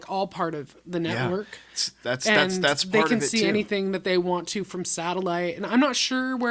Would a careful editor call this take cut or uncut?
uncut